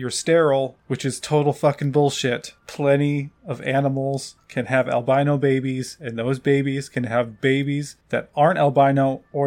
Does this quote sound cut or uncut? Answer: uncut